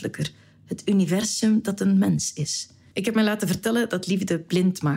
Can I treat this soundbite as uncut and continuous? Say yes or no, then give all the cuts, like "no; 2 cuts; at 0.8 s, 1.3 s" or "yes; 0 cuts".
no; 1 cut; at 2.9 s